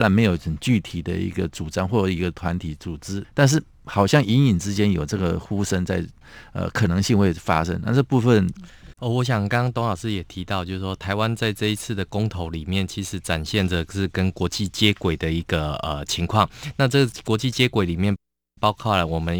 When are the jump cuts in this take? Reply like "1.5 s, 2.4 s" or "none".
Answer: 3.2 s, 8.9 s